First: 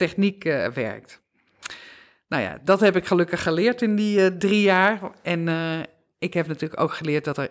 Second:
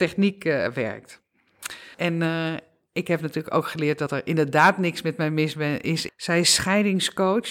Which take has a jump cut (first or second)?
second